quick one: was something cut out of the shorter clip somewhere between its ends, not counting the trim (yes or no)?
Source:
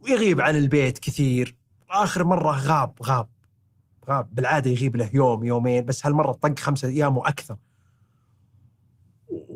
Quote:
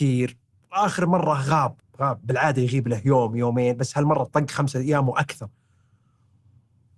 yes